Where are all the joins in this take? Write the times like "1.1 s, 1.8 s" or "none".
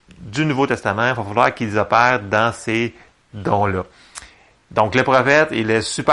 none